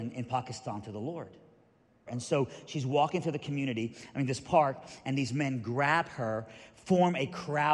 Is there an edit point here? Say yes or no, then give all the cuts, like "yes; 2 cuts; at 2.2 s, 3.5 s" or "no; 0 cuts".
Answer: yes; 1 cut; at 2.1 s